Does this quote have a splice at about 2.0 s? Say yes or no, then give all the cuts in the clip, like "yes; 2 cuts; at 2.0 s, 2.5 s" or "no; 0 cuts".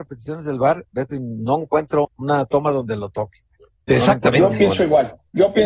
yes; 1 cut; at 2.0 s